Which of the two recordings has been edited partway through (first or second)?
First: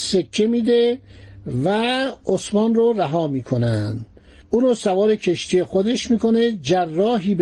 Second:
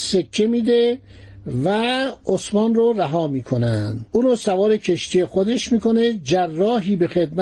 second